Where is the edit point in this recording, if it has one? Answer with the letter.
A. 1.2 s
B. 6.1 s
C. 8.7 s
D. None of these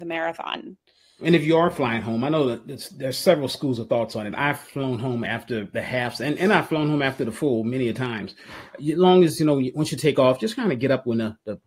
A